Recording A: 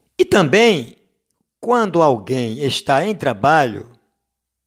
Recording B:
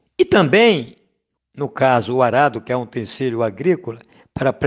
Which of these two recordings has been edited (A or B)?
B